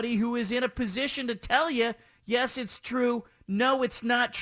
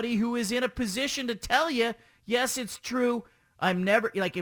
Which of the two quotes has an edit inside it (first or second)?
second